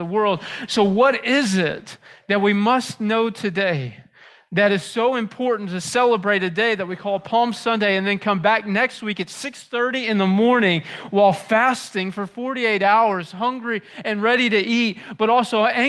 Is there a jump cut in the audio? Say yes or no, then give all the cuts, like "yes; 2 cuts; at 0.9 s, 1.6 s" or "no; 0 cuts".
no; 0 cuts